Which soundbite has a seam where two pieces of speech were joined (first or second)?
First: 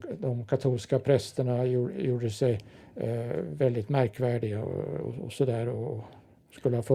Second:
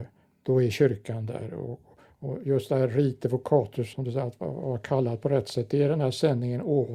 second